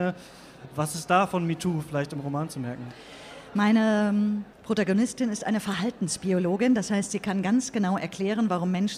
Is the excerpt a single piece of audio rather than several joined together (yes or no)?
no